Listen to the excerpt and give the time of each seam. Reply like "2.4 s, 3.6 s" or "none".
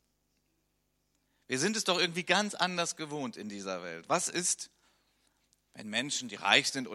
none